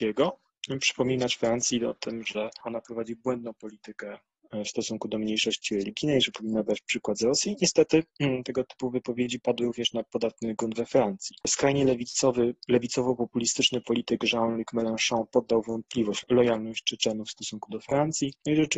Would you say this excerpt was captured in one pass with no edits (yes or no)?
yes